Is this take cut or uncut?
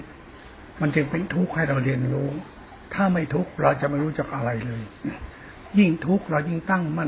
uncut